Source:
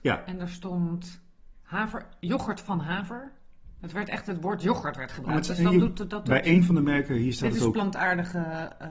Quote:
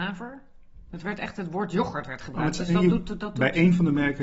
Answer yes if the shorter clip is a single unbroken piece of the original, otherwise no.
yes